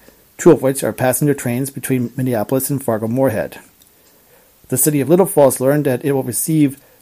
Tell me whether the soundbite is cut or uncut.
uncut